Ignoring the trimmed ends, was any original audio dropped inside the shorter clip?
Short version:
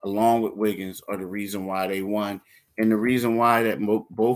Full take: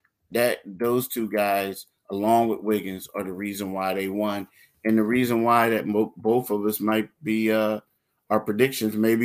no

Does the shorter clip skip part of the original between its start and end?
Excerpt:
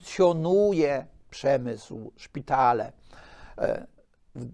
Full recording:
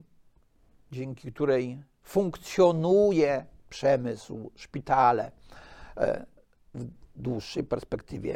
no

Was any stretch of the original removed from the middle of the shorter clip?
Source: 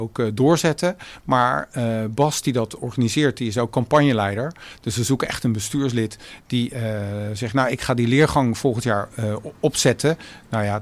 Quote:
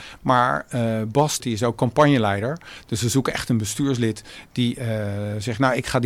yes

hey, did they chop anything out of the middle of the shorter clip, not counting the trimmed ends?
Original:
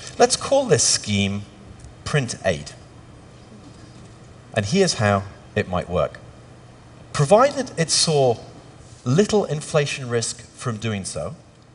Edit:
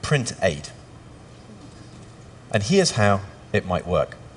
no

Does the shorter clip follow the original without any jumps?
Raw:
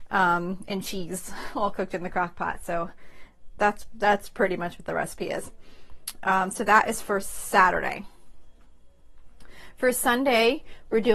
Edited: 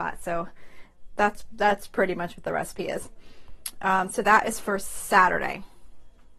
yes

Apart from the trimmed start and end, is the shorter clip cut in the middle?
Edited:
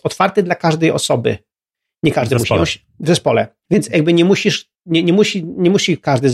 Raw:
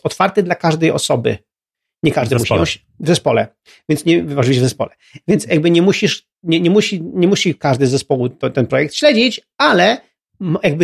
yes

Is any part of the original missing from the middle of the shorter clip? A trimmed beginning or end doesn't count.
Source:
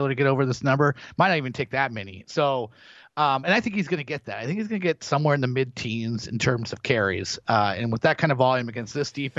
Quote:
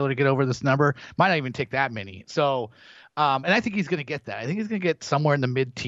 no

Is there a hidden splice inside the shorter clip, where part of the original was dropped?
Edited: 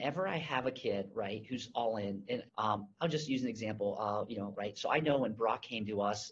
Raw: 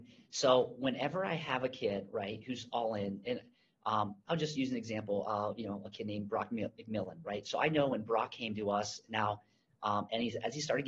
yes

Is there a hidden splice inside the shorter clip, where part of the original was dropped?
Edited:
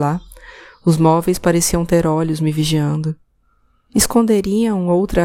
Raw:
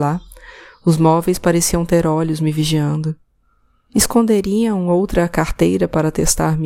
no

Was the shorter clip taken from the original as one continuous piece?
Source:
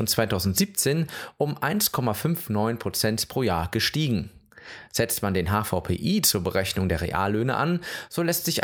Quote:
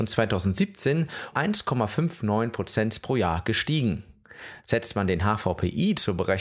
no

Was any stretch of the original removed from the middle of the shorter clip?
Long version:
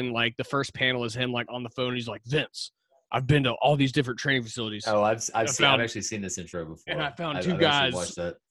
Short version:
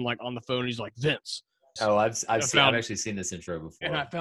yes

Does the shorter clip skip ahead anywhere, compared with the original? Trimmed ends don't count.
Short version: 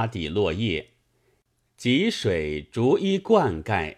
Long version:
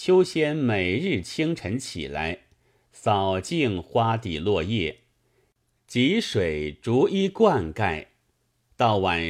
no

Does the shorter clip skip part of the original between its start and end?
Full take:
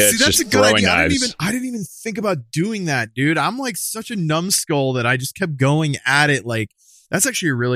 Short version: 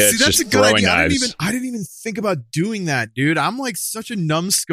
no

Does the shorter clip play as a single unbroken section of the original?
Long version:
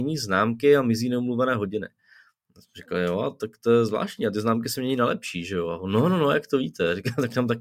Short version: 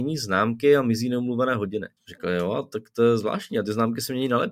no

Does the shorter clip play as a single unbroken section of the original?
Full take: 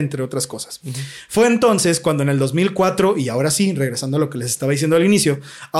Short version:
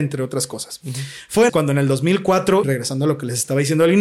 no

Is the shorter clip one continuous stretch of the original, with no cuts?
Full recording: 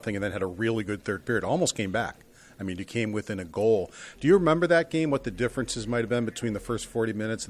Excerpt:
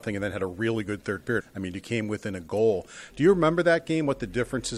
no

